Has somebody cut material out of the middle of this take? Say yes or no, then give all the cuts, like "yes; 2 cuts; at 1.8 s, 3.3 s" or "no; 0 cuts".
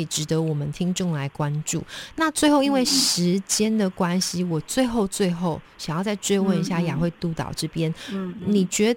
no; 0 cuts